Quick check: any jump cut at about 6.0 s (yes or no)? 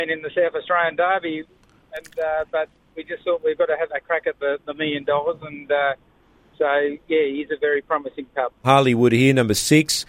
no